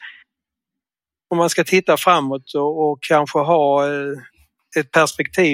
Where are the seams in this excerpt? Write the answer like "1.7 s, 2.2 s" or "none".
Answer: none